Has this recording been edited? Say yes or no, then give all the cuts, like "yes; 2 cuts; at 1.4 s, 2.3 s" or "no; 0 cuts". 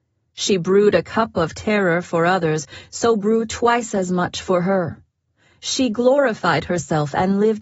no; 0 cuts